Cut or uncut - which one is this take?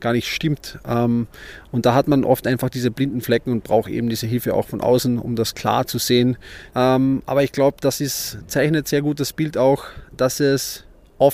cut